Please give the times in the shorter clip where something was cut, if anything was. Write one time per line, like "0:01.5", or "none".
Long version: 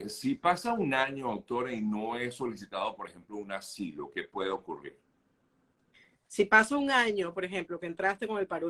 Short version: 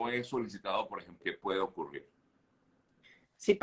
0:01.2

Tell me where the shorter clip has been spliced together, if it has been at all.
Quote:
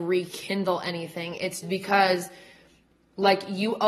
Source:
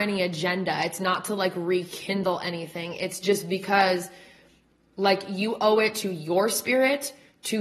0:01.6

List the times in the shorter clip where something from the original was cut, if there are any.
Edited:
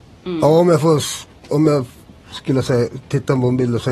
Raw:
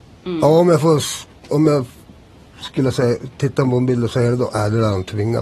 0:02.2

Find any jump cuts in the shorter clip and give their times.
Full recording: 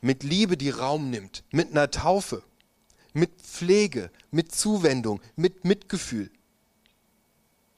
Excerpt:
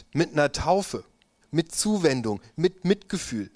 0:01.4

